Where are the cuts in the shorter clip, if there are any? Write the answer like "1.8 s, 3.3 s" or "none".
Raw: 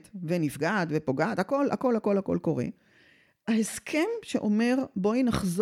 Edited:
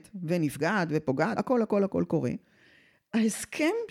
1.4 s